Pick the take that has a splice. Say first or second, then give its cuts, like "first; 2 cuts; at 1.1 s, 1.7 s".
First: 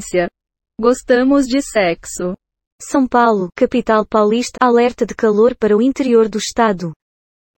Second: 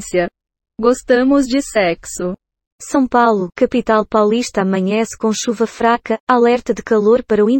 first; 1 cut; at 4.5 s